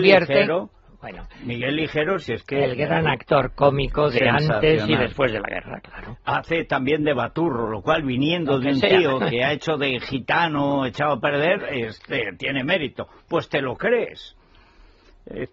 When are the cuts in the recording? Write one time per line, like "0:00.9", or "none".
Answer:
none

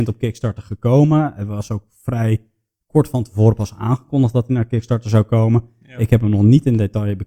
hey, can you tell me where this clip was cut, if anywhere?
none

